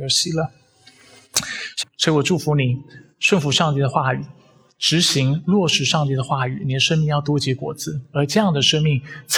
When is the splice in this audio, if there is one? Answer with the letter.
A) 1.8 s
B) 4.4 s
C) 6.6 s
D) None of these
A